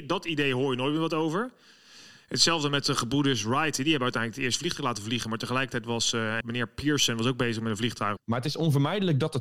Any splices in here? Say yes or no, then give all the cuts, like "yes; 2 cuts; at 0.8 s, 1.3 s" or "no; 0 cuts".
yes; 2 cuts; at 6.4 s, 8.2 s